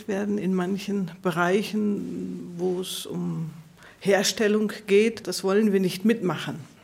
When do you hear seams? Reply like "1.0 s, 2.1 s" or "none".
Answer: none

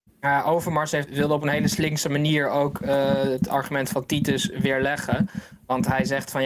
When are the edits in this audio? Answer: 1.1 s

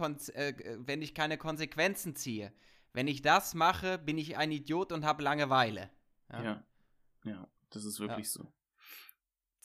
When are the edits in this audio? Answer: none

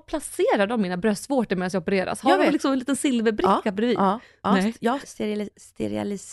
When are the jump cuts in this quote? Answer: 5.0 s

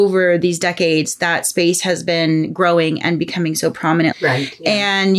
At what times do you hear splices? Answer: 4.1 s

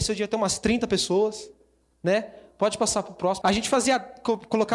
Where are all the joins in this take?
3.4 s

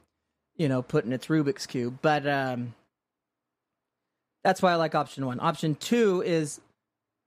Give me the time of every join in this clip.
none

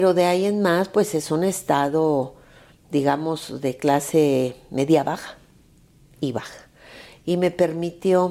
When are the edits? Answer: 7.2 s

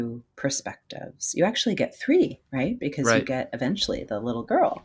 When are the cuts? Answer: none

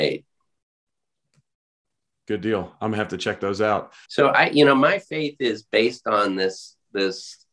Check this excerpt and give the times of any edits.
4.1 s

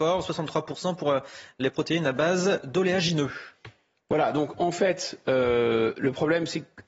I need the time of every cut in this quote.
none

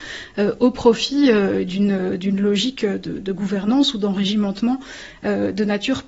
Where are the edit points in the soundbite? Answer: none

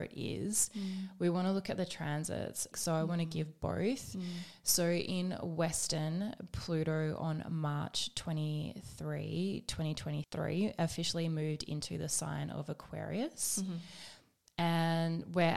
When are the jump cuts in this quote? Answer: 2.7 s

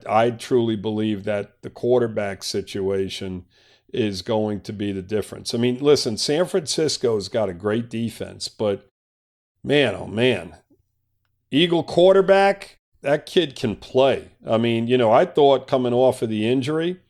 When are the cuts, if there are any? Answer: none

